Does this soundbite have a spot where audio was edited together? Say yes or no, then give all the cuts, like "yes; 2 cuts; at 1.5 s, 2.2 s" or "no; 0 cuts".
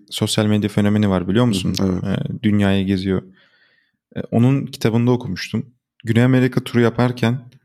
no; 0 cuts